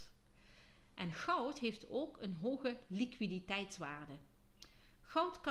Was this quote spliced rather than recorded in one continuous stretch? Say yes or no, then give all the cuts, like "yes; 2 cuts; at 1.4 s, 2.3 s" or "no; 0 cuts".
no; 0 cuts